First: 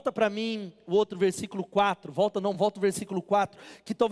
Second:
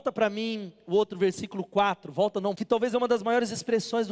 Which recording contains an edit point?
second; 1 cut; at 2.5 s

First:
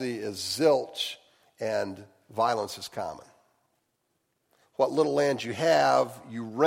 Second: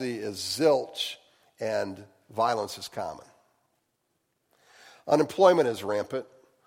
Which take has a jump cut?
first; 1 cut; at 4.6 s

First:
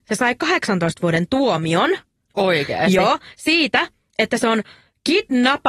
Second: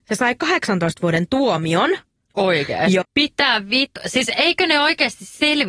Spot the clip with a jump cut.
second; 1 cut; at 3.0 s

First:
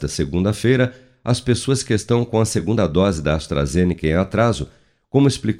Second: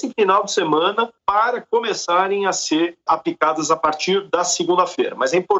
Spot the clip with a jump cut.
second; 1 cut; at 3.1 s

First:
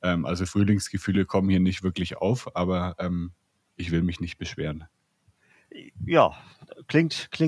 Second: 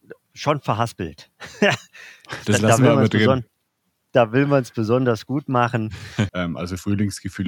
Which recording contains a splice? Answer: second; 2 cuts; at 2.4 s, 6.3 s

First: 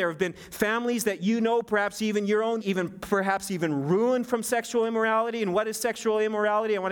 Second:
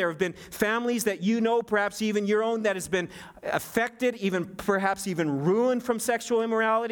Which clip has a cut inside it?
first; 1 cut; at 2.6 s

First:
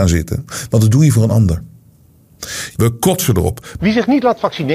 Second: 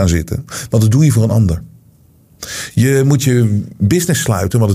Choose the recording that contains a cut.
first; 2 cuts; at 2.7 s, 3.8 s

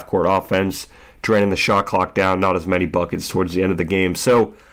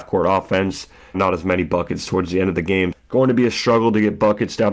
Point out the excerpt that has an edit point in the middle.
second; 2 cuts; at 1.1 s, 2.9 s

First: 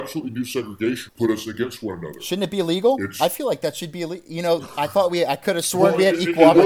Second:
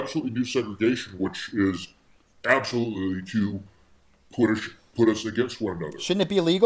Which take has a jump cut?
first; 1 cut; at 1.1 s

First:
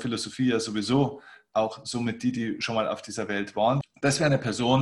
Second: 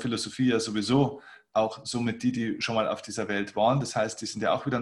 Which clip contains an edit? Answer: first; 1 cut; at 3.8 s

